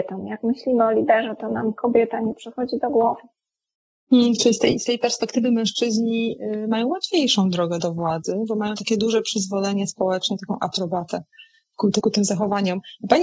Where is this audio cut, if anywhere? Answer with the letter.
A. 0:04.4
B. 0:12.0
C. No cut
B